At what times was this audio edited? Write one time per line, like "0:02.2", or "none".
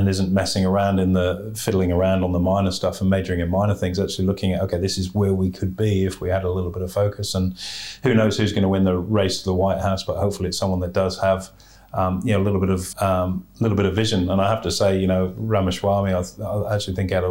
0:12.9